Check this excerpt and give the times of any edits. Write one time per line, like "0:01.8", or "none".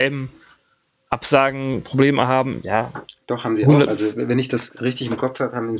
none

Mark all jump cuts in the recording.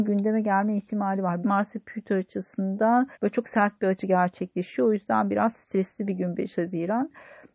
0:01.4
0:03.1

